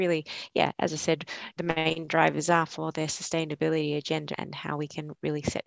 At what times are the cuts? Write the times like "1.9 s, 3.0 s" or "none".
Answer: 1.6 s, 4.3 s